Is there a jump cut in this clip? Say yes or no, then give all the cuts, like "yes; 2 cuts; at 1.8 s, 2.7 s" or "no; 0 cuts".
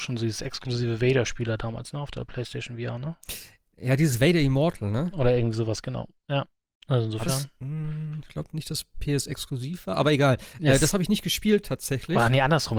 no; 0 cuts